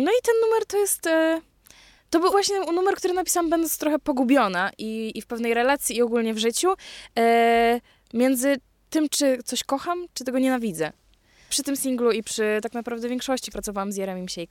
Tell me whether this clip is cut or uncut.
cut